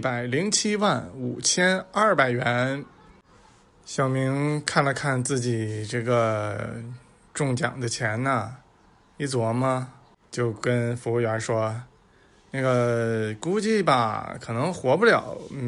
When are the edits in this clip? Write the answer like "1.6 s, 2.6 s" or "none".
none